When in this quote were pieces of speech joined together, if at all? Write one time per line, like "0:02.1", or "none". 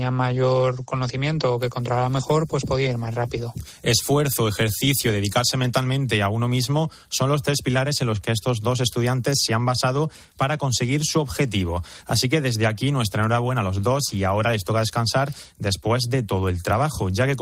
none